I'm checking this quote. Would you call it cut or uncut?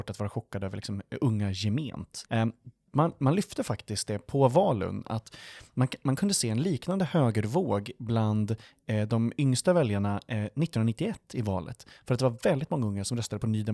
cut